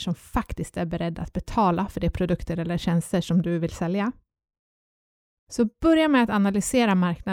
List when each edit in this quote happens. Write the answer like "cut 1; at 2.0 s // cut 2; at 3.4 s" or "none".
cut 1; at 5.4 s